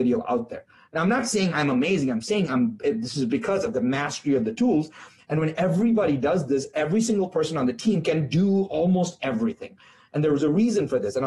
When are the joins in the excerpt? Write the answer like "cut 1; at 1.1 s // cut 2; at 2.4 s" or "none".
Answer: none